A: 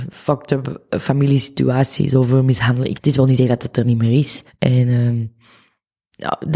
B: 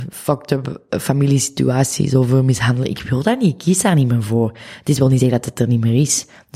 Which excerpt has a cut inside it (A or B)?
A